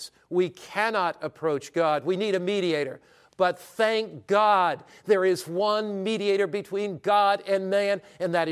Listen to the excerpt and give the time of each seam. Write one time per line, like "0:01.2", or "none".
none